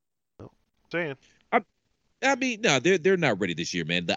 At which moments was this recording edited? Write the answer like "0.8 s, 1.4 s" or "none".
0.9 s